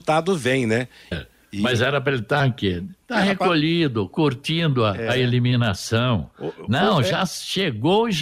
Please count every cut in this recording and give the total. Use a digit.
1